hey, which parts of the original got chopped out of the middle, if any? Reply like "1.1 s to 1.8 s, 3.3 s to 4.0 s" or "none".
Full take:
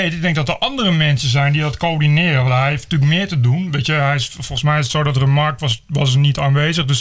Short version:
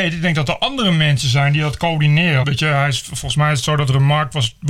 2.4 s to 3.7 s